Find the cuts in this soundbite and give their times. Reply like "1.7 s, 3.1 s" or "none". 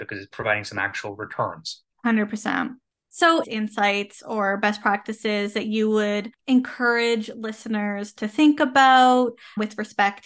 1.9 s, 3.4 s